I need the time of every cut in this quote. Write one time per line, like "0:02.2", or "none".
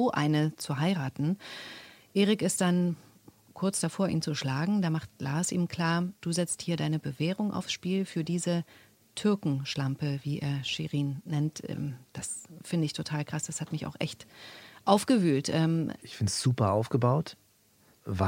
0:16.0